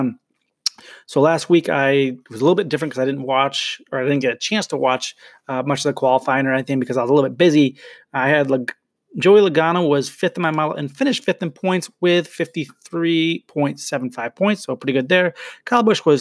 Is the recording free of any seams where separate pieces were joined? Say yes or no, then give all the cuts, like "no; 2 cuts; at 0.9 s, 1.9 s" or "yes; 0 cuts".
yes; 0 cuts